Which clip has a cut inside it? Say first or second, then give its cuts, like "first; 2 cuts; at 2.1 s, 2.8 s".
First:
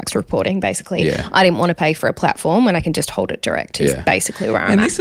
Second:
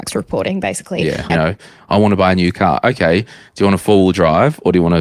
second; 1 cut; at 1.3 s